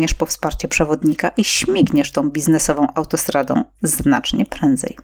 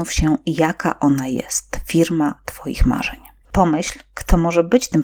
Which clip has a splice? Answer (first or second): second